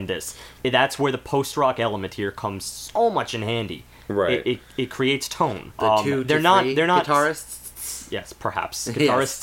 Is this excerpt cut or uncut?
cut